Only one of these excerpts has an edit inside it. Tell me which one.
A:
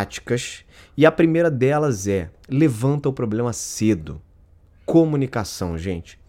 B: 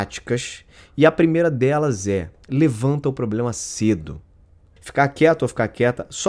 B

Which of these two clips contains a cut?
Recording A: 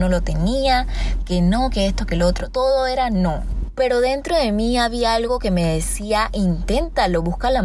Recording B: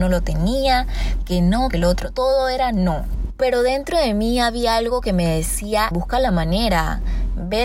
B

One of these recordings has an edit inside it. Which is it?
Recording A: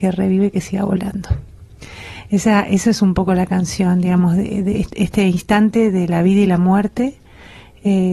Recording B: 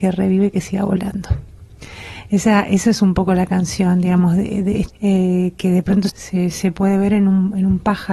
B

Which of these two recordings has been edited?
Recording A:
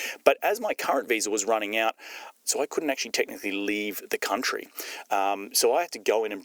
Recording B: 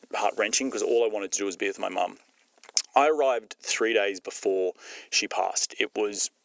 A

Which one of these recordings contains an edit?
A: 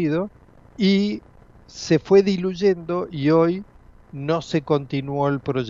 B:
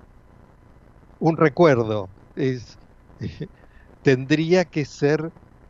A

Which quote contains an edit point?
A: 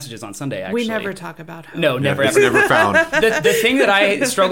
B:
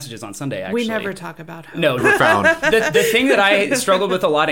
B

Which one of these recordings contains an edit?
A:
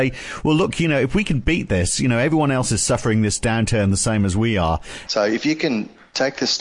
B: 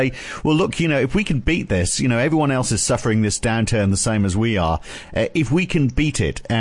A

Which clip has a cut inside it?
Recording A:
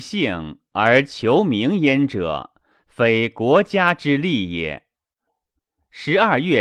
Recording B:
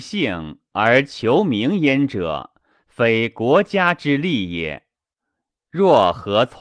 A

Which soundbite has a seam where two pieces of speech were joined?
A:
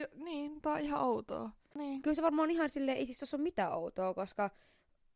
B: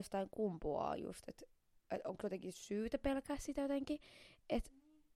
A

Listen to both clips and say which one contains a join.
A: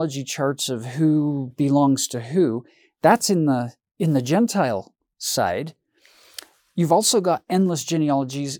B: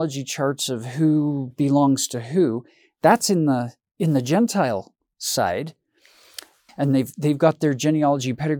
B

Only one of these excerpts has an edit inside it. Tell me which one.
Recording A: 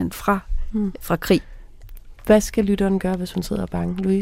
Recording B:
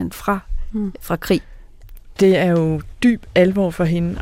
B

